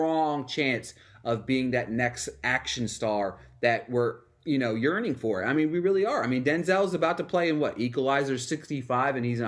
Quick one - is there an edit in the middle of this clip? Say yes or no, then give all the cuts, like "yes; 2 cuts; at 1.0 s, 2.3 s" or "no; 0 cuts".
no; 0 cuts